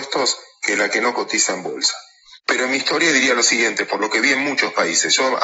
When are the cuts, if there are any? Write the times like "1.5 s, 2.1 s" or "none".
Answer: 2.4 s